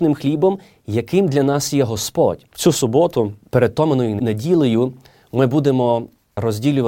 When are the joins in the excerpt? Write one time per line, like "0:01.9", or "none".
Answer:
none